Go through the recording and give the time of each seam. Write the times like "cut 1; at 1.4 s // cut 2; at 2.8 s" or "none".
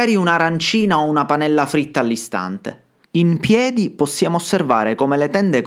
cut 1; at 3.0 s